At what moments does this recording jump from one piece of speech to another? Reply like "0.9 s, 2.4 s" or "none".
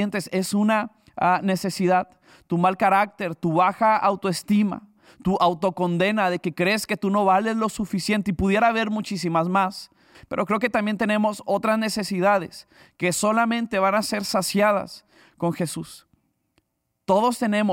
10.1 s